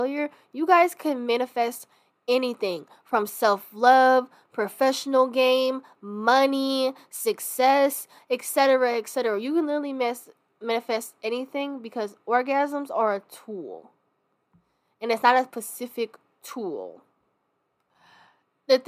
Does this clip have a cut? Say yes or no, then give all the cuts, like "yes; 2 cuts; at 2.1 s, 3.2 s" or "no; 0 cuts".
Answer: no; 0 cuts